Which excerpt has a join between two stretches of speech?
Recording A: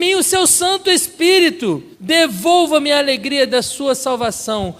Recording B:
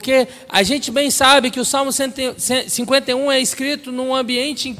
A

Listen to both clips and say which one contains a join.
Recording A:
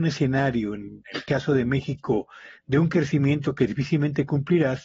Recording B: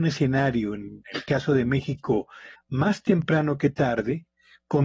B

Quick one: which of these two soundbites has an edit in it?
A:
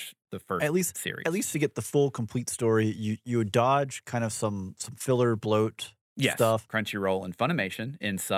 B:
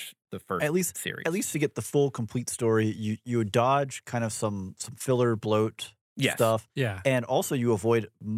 A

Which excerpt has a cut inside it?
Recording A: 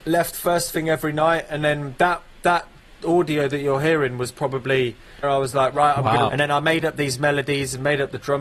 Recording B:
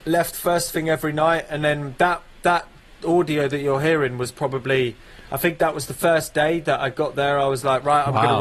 A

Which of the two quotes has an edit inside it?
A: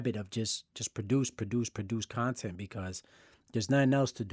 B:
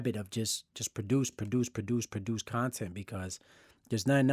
A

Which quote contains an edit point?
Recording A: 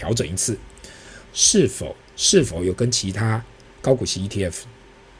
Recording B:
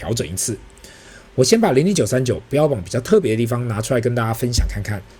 A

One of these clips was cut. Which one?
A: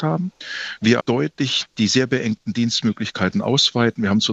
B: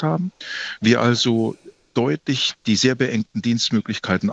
A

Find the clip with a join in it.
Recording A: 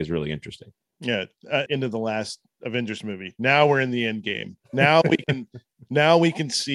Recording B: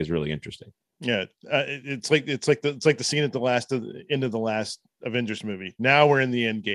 A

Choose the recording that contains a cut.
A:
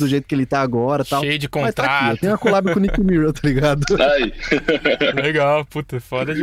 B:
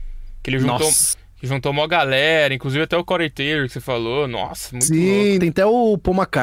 B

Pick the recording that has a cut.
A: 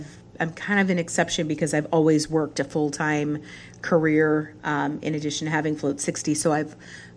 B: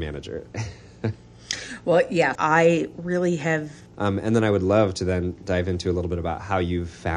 B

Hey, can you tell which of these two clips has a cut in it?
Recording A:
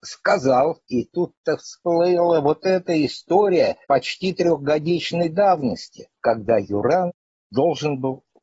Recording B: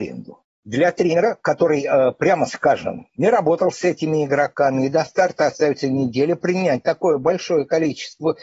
A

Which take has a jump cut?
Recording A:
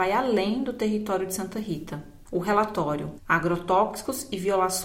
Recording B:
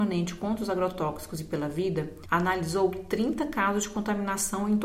A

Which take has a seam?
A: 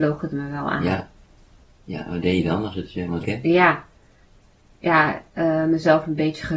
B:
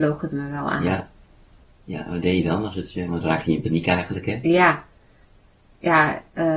A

